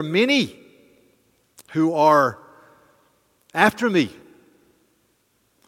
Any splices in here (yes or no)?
no